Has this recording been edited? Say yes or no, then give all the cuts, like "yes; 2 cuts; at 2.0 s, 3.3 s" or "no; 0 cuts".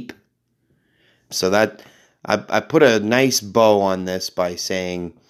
yes; 1 cut; at 1.3 s